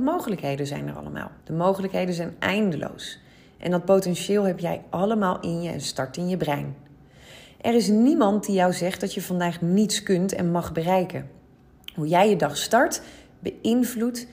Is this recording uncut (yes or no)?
no